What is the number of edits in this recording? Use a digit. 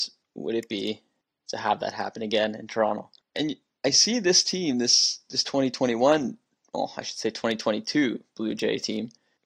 0